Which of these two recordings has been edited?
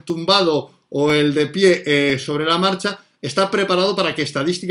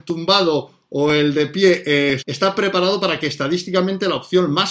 second; 1 cut; at 2.2 s

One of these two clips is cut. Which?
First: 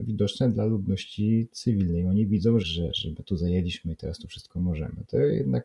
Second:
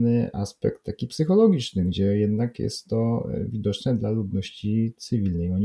first; 1 cut; at 2.6 s

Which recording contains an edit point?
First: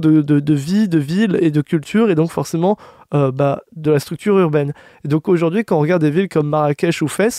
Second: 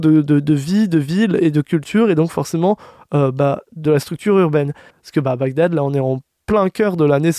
second; 1 cut; at 4.9 s

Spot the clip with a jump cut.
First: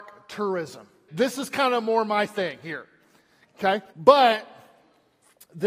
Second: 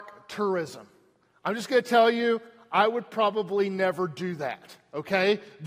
first; 2 cuts; at 1.1 s, 3.9 s

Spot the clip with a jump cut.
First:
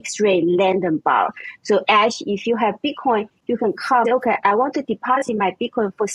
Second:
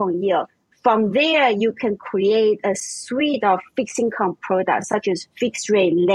first; 2 cuts; at 1.6 s, 4.0 s

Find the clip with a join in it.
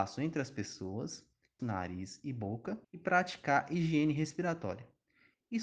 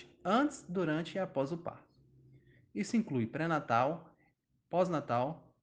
first; 2 cuts; at 1.6 s, 2.8 s

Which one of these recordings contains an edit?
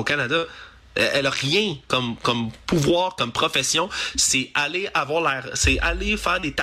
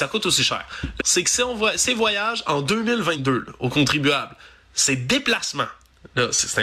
second; 1 cut; at 1.0 s

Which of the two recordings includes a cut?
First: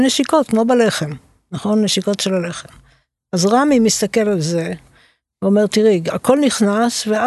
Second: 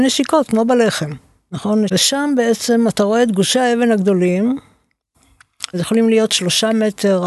second; 2 cuts; at 1.9 s, 5.7 s

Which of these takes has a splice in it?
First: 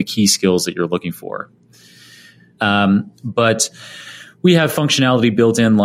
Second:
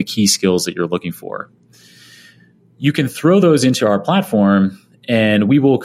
first; 1 cut; at 2.6 s

